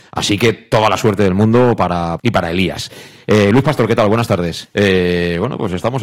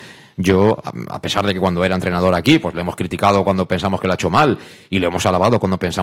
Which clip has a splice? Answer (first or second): first